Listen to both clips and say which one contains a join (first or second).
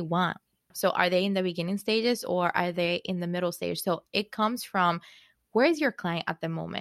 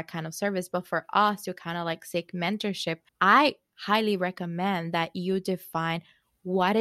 second